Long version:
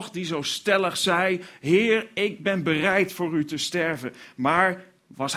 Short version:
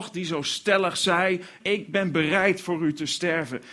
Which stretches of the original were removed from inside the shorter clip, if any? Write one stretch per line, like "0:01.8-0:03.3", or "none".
0:01.6-0:02.1